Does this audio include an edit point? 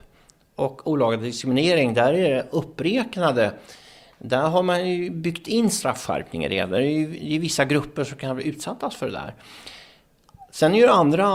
no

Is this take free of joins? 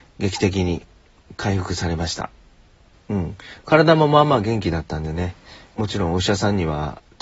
no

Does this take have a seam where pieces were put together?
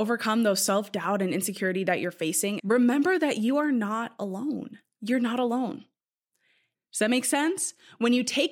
yes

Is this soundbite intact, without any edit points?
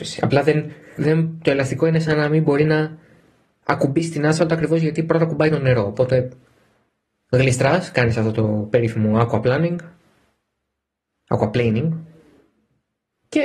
no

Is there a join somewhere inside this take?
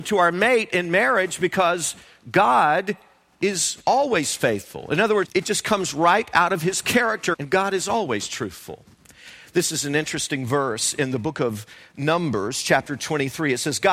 yes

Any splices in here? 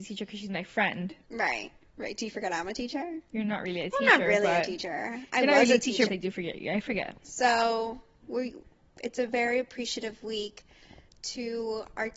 yes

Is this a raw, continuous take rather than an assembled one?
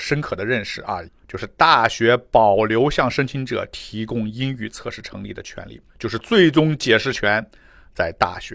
no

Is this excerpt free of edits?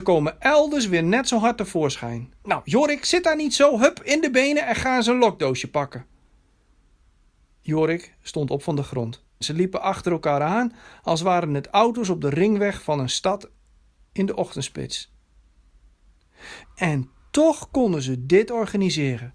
no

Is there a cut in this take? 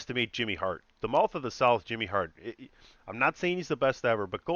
no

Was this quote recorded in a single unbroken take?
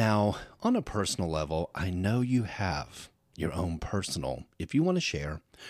yes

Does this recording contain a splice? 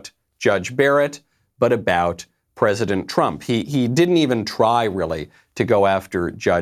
no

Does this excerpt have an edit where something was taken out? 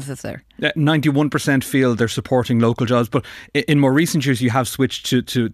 no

